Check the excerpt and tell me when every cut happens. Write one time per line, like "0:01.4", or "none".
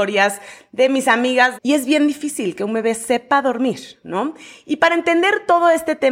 0:01.5